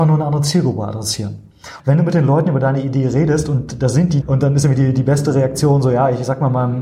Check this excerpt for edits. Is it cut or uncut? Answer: cut